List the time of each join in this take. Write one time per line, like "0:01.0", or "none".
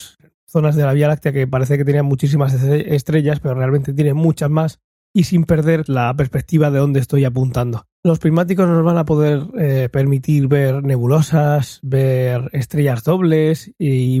0:05.9
0:07.9